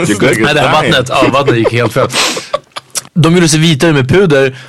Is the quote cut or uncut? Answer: cut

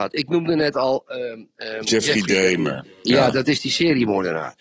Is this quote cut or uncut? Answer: uncut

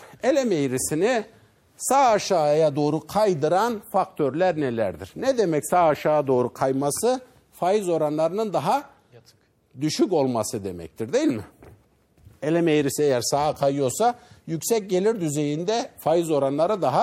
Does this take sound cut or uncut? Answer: uncut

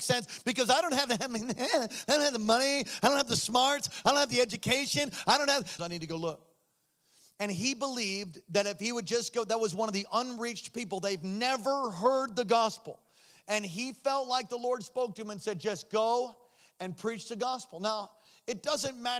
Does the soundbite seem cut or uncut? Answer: cut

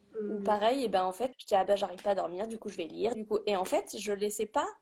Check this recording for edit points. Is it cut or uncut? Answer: cut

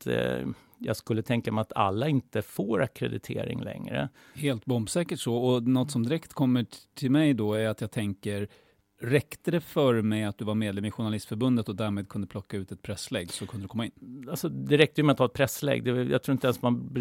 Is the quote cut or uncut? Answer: uncut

